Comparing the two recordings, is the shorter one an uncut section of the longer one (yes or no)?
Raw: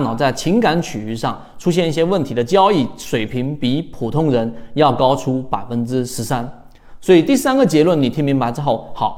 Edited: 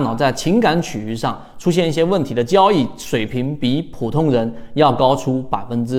yes